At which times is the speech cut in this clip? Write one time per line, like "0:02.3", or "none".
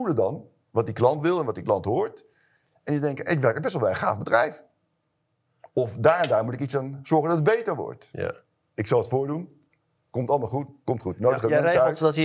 0:08.7
0:10.8